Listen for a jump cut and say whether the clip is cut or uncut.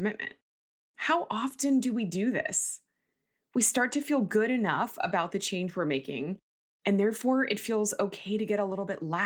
uncut